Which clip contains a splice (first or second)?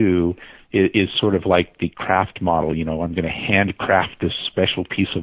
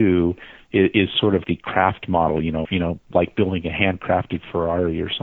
second